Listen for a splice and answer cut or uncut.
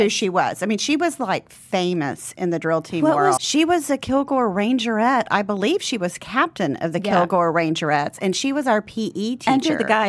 cut